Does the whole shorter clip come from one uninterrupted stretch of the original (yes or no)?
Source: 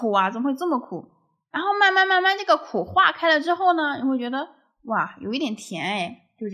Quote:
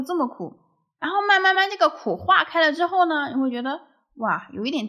no